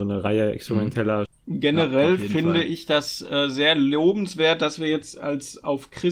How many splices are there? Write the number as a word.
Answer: one